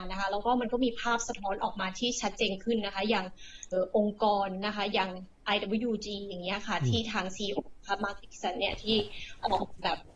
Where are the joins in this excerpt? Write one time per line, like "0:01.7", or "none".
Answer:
0:03.7